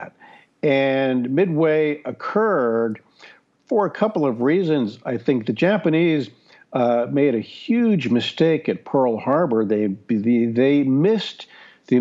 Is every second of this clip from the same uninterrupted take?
yes; 0 cuts

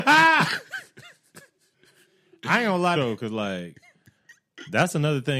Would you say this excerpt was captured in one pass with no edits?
no; 1 cut; at 3.0 s

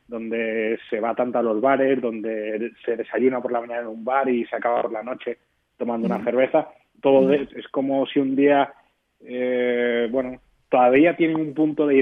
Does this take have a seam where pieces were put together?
yes; 1 cut; at 7.5 s

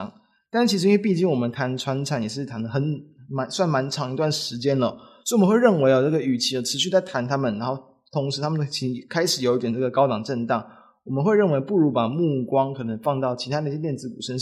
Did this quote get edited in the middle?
no; 0 cuts

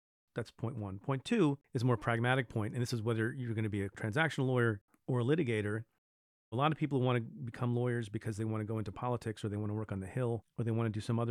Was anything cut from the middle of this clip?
yes; 1 cut; at 6.4 s

